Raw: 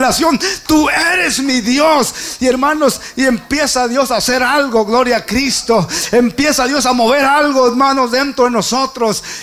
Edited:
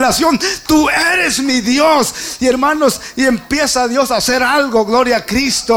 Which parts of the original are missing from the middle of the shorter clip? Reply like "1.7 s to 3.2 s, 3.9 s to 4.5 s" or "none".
none